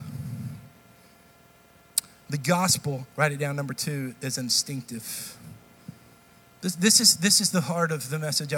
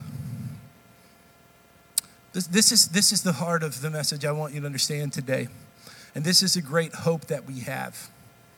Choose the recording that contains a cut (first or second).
second